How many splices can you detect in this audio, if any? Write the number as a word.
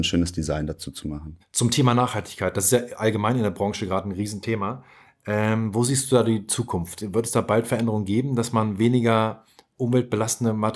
zero